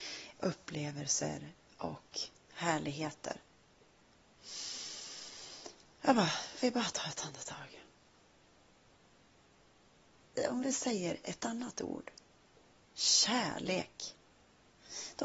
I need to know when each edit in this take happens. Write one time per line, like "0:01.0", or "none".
none